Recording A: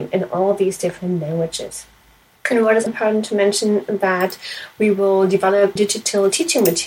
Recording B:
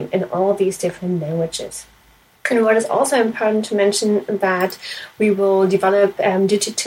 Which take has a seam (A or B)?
A